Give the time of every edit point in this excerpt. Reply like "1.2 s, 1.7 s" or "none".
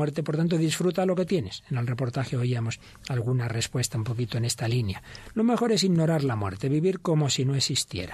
none